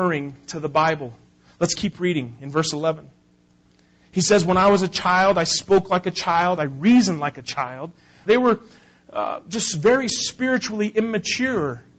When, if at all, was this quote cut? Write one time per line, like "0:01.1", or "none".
0:06.6
0:08.3